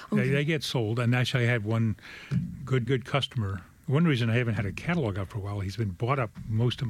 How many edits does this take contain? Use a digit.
1